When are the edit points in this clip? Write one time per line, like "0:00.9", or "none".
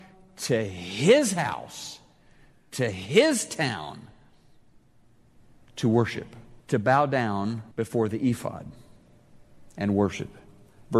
0:06.6
0:07.7